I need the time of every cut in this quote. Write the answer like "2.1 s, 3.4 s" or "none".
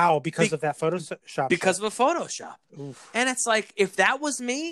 none